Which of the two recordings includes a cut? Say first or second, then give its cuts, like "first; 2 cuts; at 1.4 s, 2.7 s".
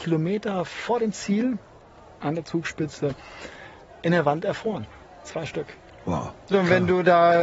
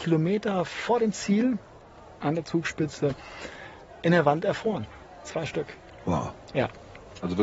first; 1 cut; at 6.5 s